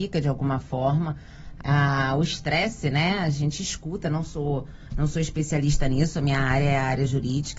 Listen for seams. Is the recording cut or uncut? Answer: cut